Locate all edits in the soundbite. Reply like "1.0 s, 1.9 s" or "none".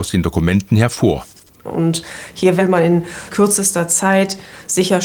1.6 s, 3.3 s